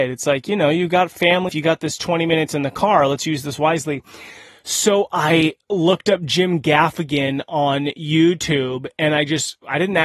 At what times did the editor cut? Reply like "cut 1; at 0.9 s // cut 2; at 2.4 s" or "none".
cut 1; at 1.5 s